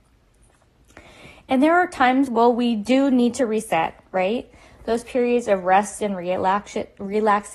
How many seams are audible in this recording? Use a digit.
0